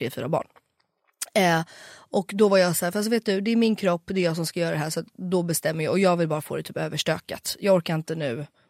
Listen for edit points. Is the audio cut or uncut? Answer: uncut